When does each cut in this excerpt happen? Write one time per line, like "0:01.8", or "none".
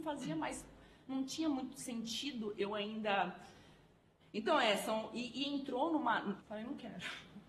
0:04.2
0:06.4